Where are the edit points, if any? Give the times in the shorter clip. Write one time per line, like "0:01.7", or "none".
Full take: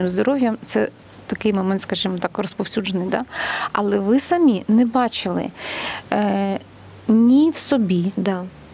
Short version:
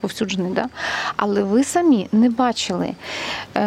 none